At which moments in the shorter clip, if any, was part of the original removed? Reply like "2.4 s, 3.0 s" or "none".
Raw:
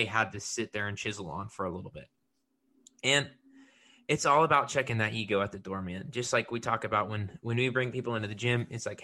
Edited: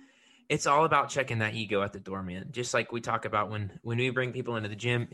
none